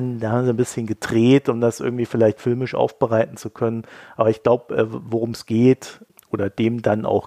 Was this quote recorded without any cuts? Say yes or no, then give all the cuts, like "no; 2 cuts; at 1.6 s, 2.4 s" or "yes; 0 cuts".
yes; 0 cuts